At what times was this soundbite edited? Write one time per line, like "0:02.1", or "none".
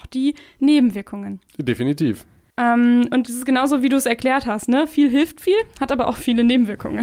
0:02.5